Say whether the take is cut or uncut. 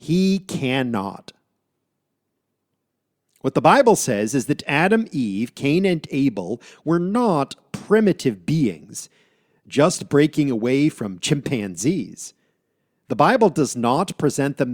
uncut